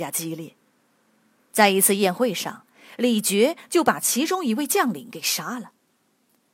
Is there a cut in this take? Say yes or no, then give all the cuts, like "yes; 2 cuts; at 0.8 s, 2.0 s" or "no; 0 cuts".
no; 0 cuts